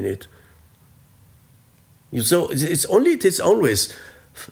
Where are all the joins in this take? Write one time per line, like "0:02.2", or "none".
none